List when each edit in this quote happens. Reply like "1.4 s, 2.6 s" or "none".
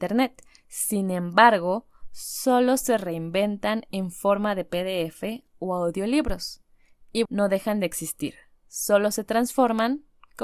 7.3 s